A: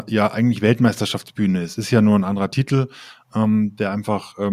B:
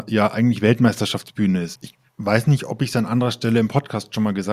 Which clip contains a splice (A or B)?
B